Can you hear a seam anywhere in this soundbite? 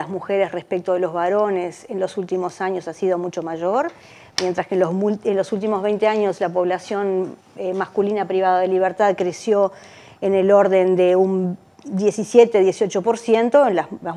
no; 0 cuts

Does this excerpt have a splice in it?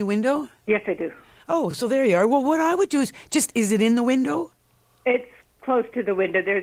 no; 0 cuts

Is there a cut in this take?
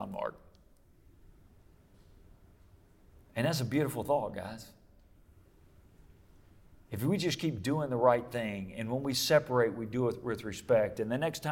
no; 0 cuts

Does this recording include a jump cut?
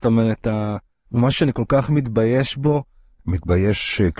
yes; 1 cut; at 1.1 s

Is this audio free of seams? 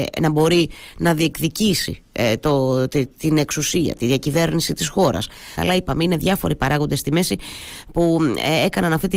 no; 1 cut; at 5.6 s

